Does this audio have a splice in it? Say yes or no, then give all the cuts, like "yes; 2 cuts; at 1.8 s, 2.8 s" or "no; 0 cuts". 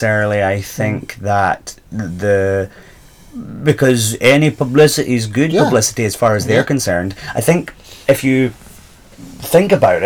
no; 0 cuts